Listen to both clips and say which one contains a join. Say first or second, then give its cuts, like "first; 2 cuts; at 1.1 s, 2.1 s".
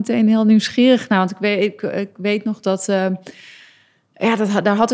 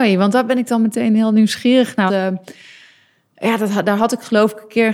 second; 1 cut; at 2.1 s